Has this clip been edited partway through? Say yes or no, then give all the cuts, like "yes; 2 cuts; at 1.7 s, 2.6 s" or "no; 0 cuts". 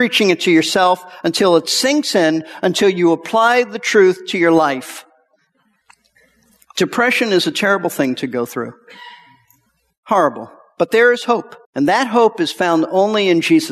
yes; 1 cut; at 11.6 s